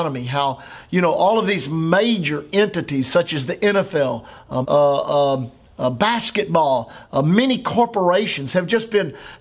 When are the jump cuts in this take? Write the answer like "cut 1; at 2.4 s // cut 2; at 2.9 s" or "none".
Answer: cut 1; at 4.6 s